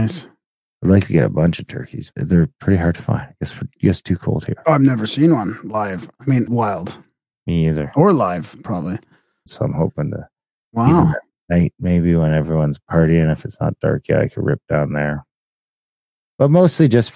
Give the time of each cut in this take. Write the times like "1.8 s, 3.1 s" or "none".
2.1 s, 6.5 s, 9.5 s